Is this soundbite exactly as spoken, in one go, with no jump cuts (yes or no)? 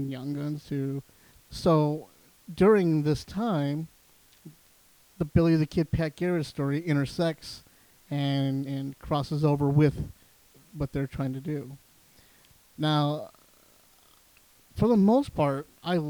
no